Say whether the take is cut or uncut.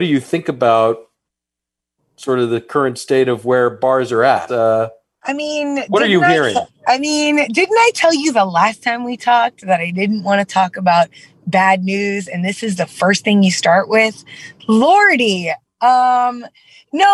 cut